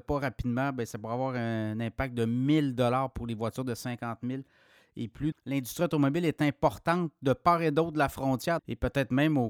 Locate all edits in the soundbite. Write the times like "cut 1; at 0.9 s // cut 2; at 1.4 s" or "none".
cut 1; at 5.3 s // cut 2; at 8.6 s